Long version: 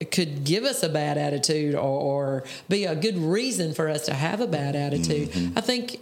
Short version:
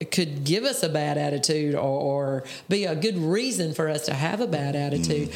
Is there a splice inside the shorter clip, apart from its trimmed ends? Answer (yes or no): no